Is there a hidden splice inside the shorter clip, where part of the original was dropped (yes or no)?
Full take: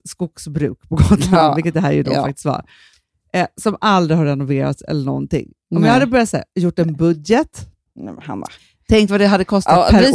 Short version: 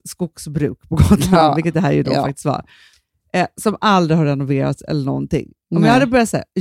no